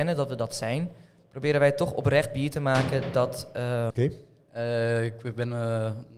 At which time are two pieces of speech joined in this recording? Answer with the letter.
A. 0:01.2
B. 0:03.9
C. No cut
B